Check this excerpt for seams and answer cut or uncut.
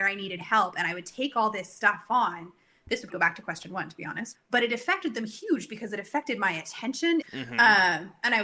cut